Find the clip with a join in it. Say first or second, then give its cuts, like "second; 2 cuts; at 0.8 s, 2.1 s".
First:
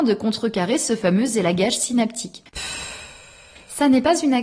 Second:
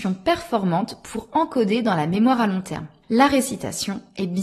first; 1 cut; at 2.5 s